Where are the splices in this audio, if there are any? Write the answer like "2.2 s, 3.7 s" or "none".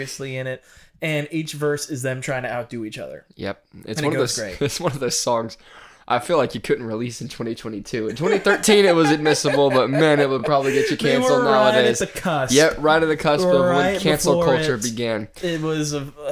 none